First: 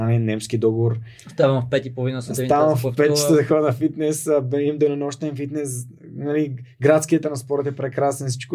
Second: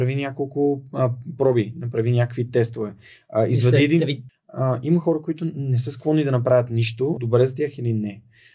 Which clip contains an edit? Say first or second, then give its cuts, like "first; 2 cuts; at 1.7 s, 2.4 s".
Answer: second; 2 cuts; at 4.3 s, 7.2 s